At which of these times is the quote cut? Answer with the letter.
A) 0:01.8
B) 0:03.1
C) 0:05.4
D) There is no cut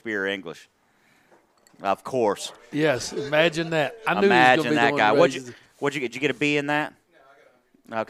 D